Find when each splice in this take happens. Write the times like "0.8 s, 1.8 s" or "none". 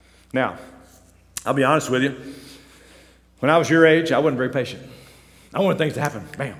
none